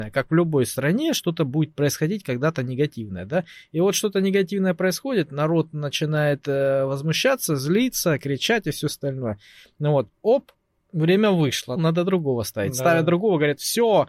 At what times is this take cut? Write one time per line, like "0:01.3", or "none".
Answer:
0:10.2
0:11.8